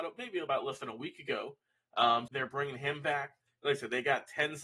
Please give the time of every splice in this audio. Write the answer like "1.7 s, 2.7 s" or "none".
2.3 s, 3.5 s